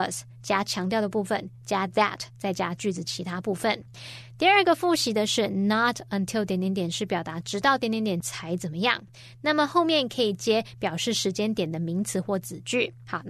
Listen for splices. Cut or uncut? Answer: uncut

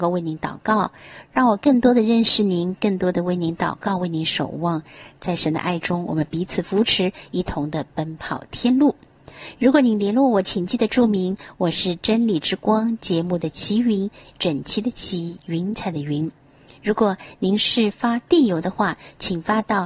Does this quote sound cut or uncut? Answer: uncut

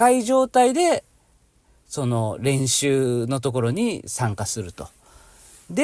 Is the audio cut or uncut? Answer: uncut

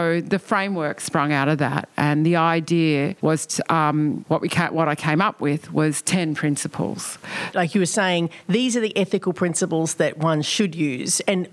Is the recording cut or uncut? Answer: cut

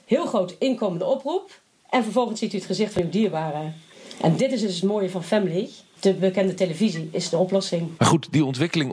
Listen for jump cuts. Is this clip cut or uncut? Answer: cut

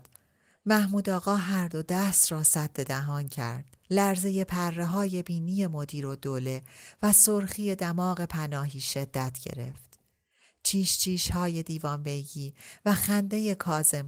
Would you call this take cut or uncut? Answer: cut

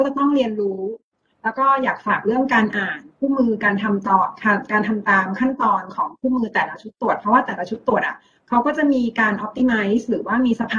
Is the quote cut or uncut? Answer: uncut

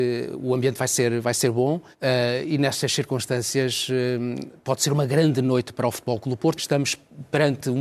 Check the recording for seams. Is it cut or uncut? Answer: cut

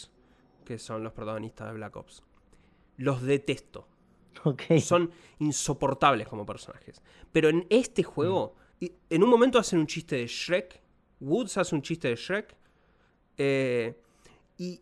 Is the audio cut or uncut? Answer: cut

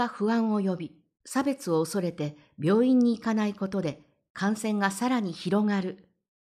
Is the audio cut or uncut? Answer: cut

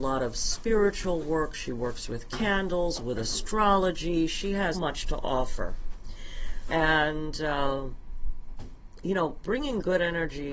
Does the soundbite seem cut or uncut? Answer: cut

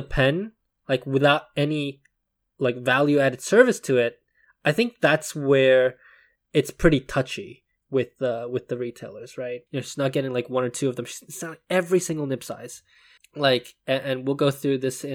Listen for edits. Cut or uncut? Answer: cut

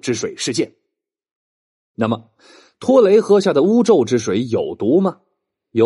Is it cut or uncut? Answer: uncut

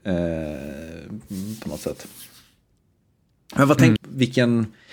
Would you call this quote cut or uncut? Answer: cut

